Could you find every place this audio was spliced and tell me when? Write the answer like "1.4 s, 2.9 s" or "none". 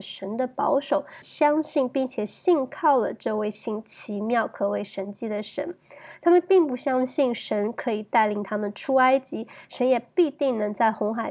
1.2 s

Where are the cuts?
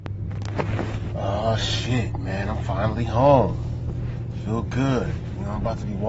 none

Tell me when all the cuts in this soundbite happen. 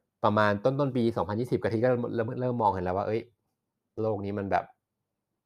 none

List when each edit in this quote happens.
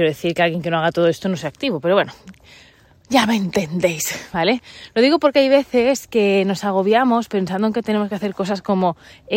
none

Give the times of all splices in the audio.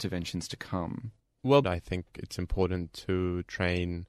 1.6 s

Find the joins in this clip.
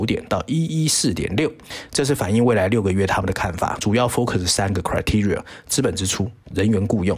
none

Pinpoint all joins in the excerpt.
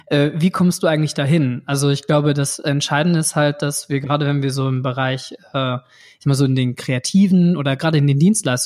none

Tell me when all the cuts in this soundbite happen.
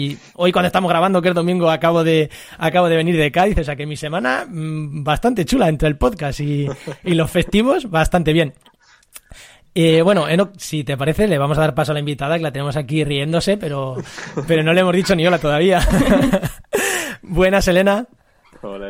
none

